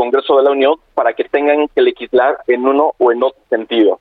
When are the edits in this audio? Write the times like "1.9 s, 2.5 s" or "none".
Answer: none